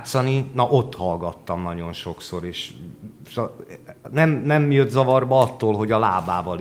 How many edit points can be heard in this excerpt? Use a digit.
0